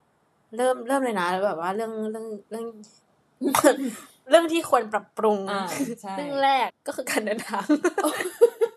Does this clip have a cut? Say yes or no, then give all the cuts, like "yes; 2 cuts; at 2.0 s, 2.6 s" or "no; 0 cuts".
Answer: yes; 1 cut; at 6.7 s